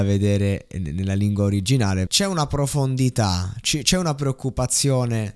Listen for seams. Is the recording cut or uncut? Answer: cut